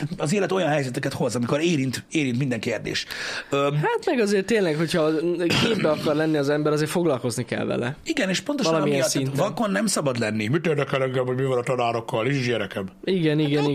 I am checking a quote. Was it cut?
no; 0 cuts

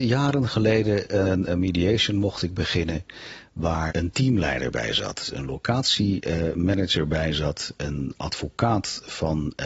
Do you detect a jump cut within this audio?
yes; 2 cuts; at 1.2 s, 3.9 s

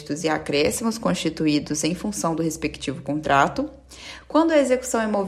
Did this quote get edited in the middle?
no; 0 cuts

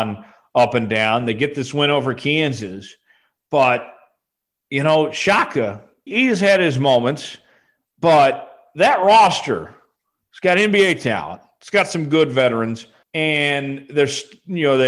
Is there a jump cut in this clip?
yes; 2 cuts; at 6.1 s, 13.0 s

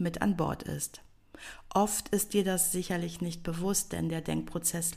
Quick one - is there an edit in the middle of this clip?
no; 0 cuts

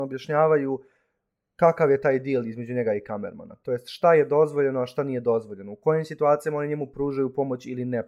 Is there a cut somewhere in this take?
no; 0 cuts

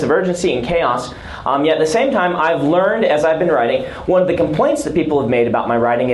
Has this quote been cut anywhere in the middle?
no; 0 cuts

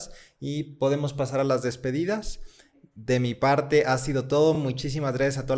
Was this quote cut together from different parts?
no; 0 cuts

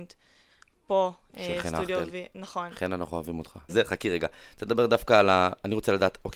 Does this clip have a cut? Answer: yes; 1 cut; at 3.7 s

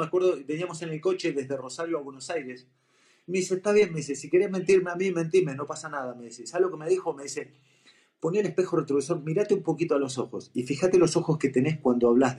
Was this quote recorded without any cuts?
yes; 0 cuts

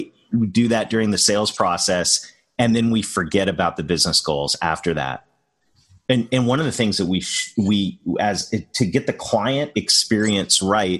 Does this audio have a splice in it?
no; 0 cuts

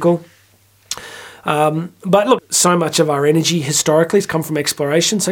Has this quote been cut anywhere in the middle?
yes; 1 cut; at 2.4 s

